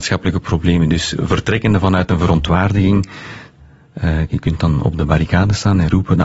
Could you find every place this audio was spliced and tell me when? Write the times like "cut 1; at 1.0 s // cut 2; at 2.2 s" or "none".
cut 1; at 4.3 s